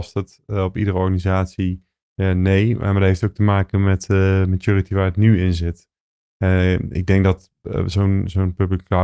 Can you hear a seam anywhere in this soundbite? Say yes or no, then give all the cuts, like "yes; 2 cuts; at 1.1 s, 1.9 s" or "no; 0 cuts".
no; 0 cuts